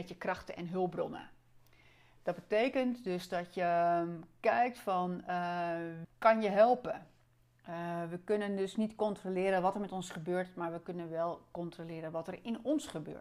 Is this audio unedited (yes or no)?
no